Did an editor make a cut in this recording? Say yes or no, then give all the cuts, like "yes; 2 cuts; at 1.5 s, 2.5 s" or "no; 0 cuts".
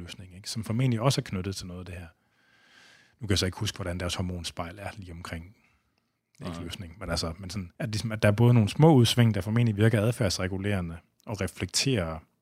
yes; 1 cut; at 7.7 s